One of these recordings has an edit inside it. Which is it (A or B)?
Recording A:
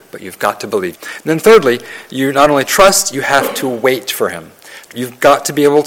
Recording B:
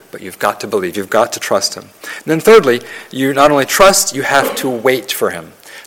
A